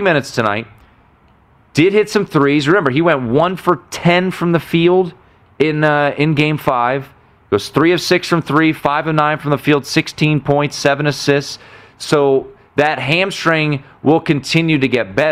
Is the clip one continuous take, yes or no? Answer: yes